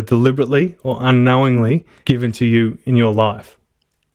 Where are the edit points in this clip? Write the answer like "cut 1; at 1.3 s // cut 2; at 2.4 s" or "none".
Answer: none